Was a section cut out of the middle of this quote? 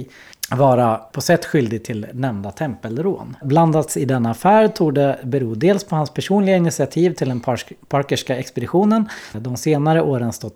yes; 3 cuts; at 1.1 s, 3.4 s, 9.3 s

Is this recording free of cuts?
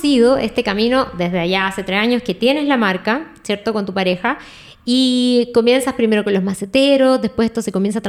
yes; 0 cuts

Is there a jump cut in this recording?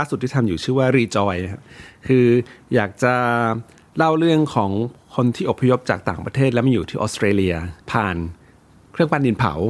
yes; 1 cut; at 7.8 s

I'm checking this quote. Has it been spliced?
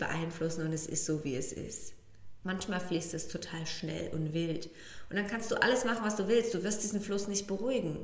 yes; 1 cut; at 2.4 s

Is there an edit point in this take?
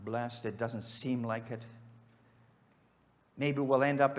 no; 0 cuts

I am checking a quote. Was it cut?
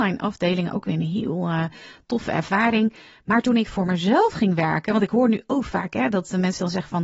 no; 0 cuts

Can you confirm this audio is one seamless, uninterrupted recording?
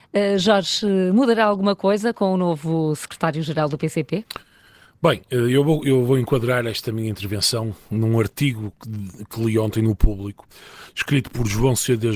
yes; 0 cuts

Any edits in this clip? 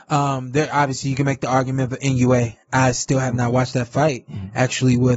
no; 0 cuts

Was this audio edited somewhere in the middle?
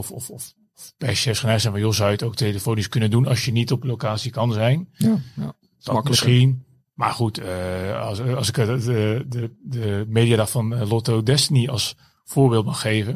no; 0 cuts

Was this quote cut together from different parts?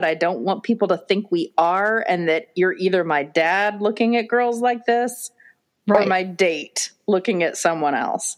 no; 0 cuts

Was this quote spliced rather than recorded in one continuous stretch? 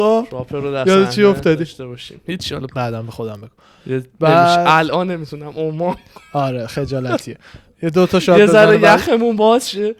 yes; 2 cuts; at 2.7 s, 4.1 s

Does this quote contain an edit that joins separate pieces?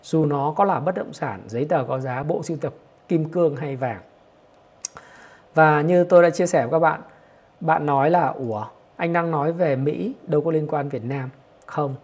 no; 0 cuts

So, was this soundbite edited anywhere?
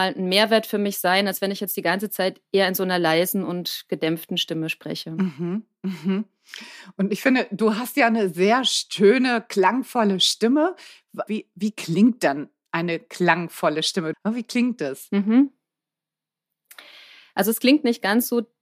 yes; 2 cuts; at 11.3 s, 14.1 s

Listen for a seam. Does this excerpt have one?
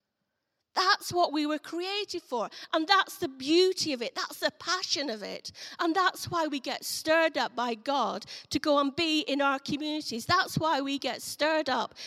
no; 0 cuts

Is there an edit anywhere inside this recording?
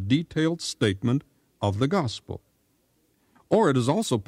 yes; 1 cut; at 3.4 s

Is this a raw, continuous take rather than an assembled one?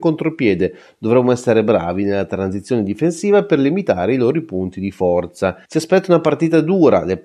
no; 1 cut; at 5.7 s

